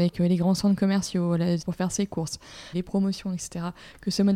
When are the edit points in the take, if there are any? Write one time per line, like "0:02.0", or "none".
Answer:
0:01.6
0:02.7